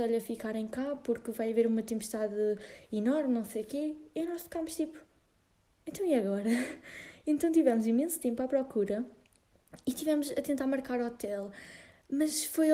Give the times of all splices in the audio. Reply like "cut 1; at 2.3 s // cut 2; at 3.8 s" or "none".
none

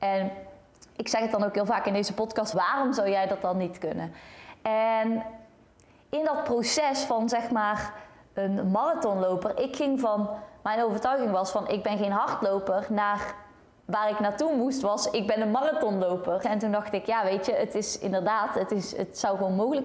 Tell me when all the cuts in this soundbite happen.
cut 1; at 2.5 s // cut 2; at 16.4 s

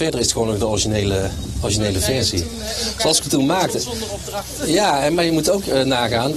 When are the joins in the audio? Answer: none

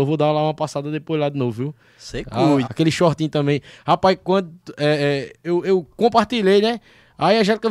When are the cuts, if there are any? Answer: cut 1; at 2.6 s

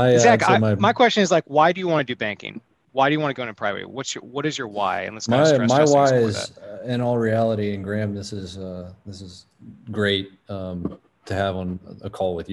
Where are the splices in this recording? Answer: none

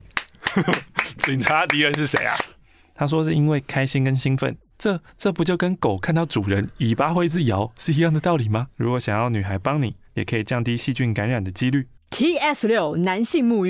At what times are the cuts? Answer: cut 1; at 2.4 s // cut 2; at 8.7 s // cut 3; at 10.0 s

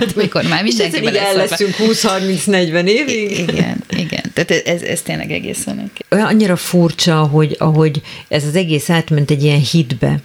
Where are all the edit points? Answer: none

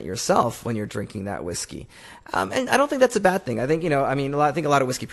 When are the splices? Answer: none

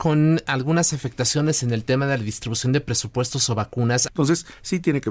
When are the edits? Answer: cut 1; at 4.1 s

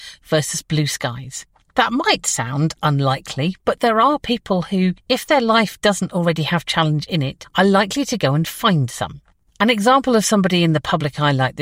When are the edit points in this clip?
cut 1; at 1.7 s

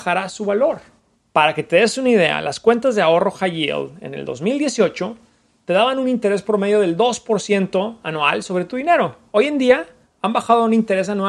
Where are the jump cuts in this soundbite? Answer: cut 1; at 1.1 s

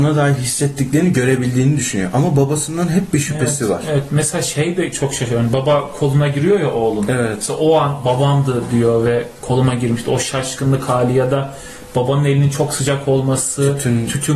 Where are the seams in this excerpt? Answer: none

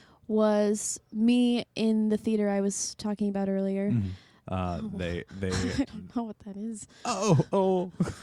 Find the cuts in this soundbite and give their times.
cut 1; at 4.4 s

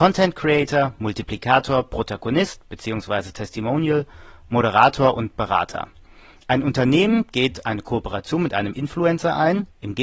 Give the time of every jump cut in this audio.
none

